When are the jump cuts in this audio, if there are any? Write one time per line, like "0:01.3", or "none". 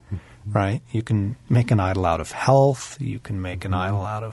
none